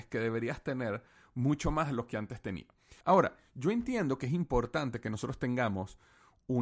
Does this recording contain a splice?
yes; 1 cut; at 3.0 s

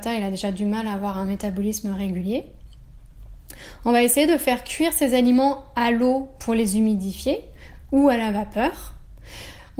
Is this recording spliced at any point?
no; 0 cuts

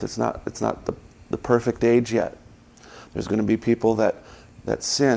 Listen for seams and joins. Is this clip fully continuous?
yes; 0 cuts

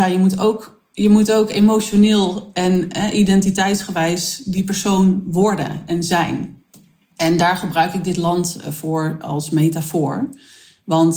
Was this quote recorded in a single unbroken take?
yes; 0 cuts

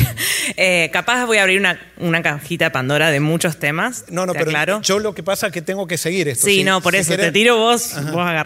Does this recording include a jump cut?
no; 0 cuts

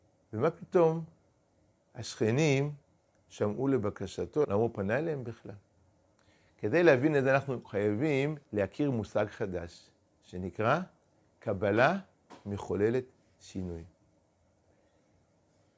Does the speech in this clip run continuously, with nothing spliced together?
no; 2 cuts; at 4.4 s, 8.5 s

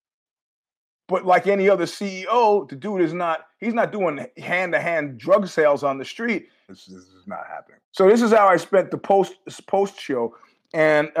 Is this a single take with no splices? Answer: no; 2 cuts; at 6.7 s, 7.8 s

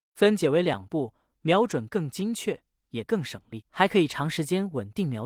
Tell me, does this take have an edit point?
no; 0 cuts

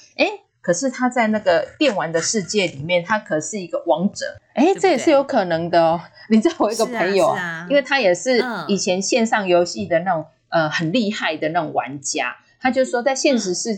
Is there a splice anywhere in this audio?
yes; 1 cut; at 4.4 s

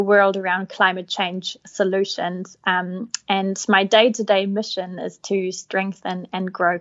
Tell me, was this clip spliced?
no; 0 cuts

